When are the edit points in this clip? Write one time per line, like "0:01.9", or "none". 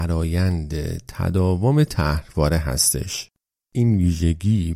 none